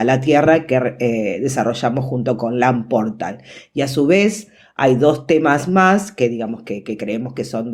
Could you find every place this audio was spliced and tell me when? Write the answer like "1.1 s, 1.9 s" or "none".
none